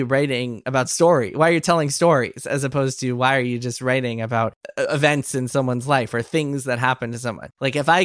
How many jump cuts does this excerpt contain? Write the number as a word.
zero